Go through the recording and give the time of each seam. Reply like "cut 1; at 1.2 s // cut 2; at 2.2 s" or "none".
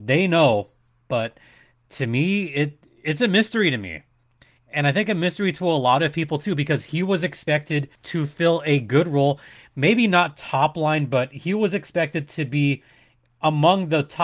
cut 1; at 8.0 s